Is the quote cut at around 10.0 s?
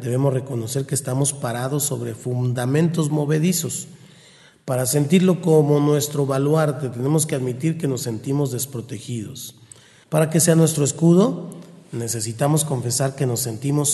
yes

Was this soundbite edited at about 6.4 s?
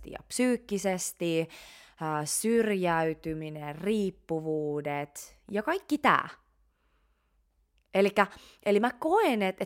no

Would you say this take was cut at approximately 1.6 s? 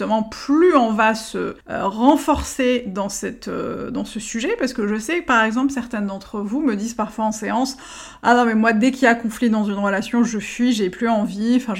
yes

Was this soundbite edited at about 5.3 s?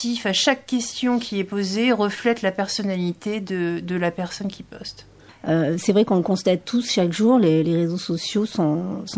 yes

